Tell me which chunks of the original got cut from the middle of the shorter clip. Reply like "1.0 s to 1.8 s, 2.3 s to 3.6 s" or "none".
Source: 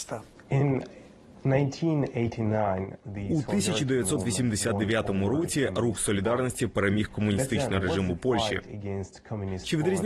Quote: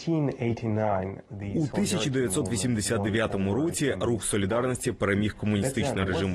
none